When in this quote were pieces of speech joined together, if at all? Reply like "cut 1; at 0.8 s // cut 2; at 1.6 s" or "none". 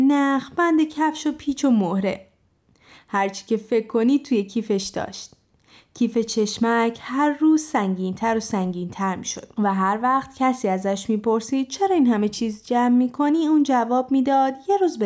none